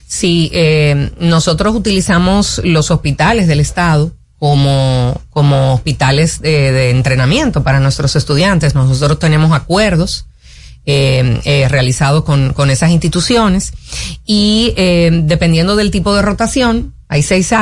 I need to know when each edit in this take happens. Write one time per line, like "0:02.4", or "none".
none